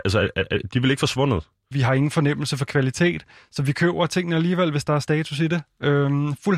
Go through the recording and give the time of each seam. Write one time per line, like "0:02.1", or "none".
0:01.7